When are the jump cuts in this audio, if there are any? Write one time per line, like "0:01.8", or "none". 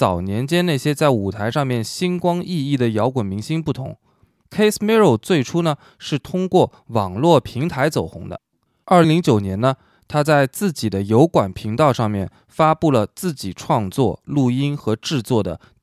0:09.0